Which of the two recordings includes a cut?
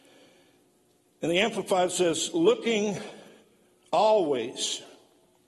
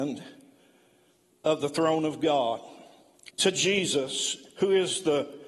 second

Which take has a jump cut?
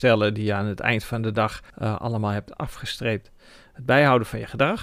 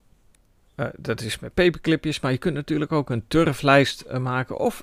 first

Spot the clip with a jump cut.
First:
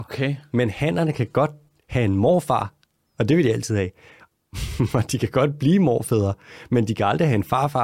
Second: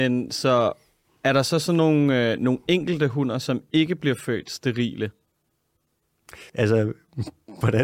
second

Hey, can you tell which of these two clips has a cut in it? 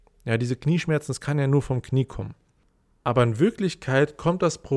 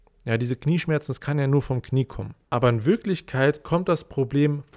second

